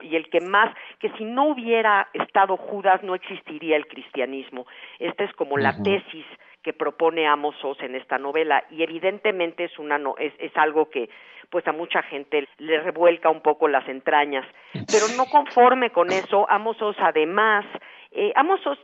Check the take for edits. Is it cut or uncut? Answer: cut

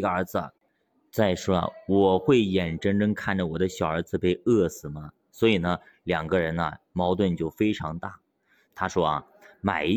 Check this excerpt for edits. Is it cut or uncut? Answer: cut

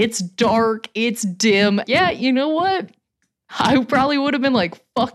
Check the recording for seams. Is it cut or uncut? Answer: cut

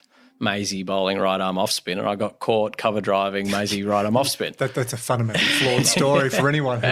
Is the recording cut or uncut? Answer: uncut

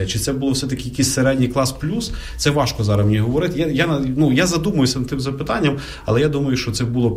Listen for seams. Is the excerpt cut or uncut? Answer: uncut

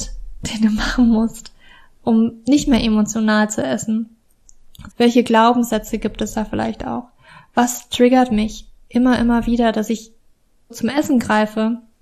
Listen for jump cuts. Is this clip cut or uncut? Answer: cut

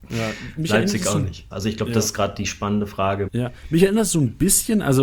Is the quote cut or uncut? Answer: cut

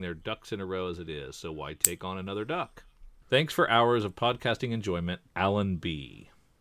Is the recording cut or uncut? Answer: cut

